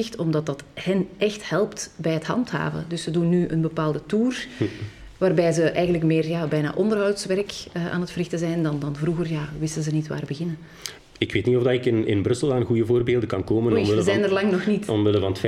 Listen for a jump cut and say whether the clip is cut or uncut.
cut